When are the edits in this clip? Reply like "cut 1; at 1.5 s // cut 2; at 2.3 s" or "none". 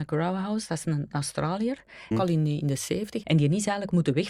cut 1; at 2.1 s // cut 2; at 3.2 s